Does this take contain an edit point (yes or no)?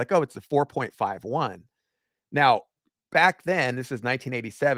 no